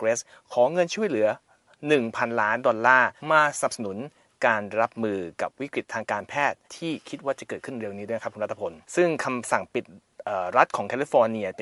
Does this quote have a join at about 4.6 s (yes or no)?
no